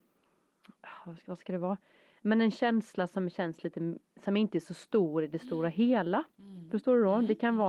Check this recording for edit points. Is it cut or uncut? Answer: uncut